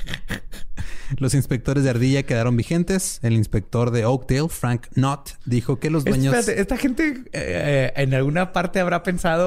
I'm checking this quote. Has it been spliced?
no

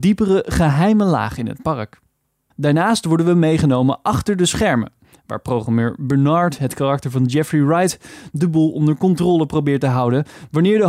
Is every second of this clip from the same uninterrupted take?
yes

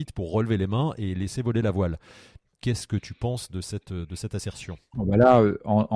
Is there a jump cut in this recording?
no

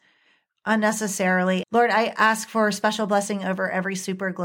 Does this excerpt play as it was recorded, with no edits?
no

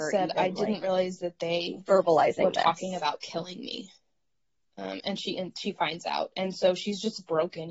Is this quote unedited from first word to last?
yes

